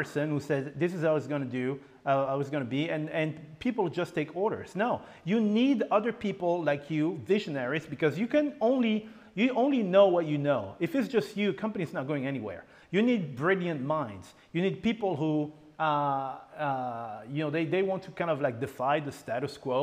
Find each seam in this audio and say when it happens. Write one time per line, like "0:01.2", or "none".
none